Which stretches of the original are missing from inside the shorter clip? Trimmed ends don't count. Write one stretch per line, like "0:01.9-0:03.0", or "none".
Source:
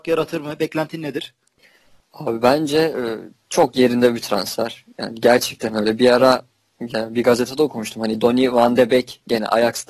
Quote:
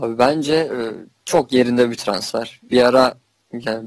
0:04.9-0:06.0

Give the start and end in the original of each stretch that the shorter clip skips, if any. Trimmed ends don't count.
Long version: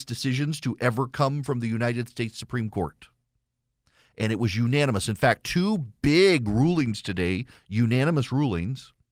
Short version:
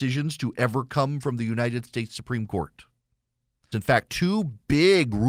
0:03.9-0:05.1

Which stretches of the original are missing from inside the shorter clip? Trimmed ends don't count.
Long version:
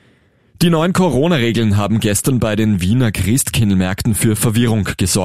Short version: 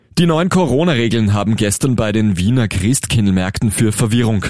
none

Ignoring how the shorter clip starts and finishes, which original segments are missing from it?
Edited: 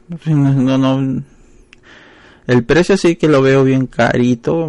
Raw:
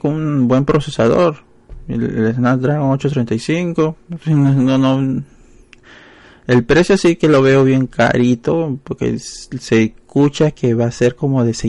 none

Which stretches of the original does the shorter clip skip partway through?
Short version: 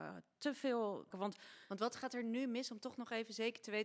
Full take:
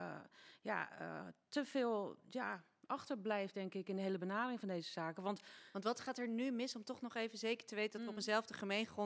0:02.2-0:05.1

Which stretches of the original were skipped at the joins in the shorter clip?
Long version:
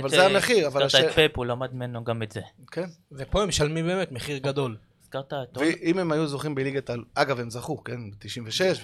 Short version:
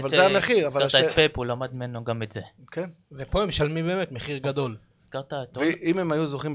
none

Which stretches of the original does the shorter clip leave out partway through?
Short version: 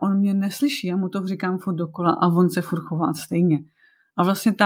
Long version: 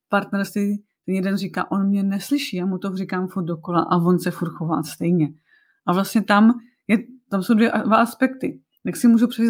none

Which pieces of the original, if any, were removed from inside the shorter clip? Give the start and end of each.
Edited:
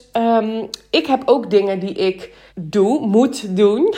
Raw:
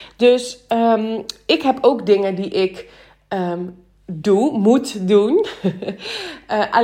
0:03.0-0:04.0

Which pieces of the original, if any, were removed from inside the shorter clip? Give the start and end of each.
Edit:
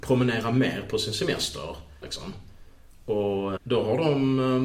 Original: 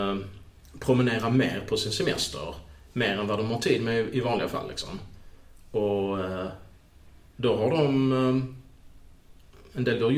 0:02.8-0:04.7
0:06.2-0:07.3

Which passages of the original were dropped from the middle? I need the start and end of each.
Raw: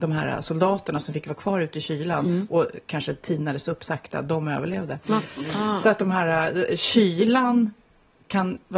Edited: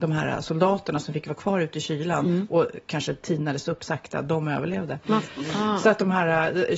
none

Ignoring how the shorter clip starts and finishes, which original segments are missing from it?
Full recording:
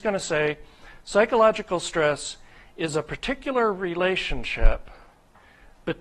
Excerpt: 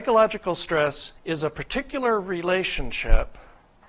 0:02.4-0:02.7

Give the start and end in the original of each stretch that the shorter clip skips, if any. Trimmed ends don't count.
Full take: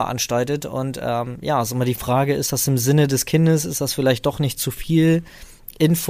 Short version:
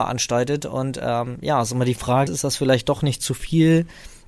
0:02.3-0:03.6

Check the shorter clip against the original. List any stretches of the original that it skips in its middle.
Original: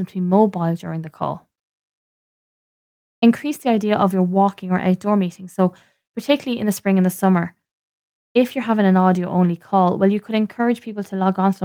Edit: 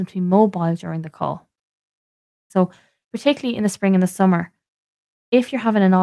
0:02.5-0:05.5

